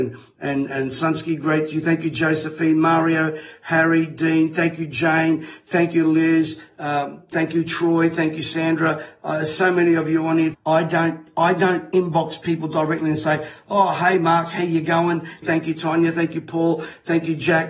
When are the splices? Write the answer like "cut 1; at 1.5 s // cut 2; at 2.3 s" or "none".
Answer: cut 1; at 10.5 s // cut 2; at 15.4 s